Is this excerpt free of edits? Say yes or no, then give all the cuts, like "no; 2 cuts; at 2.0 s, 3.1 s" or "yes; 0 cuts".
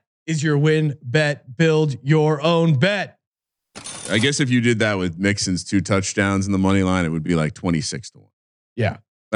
yes; 0 cuts